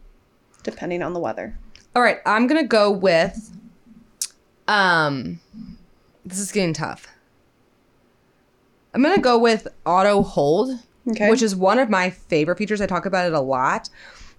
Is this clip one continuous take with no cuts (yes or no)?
yes